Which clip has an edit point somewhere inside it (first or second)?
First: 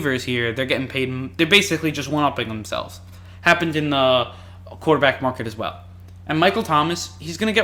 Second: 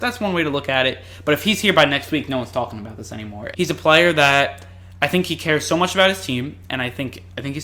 second